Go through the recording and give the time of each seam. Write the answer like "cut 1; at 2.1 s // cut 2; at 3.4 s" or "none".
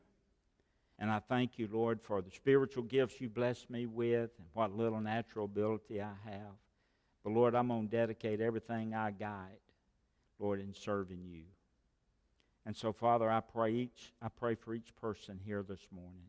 cut 1; at 1.0 s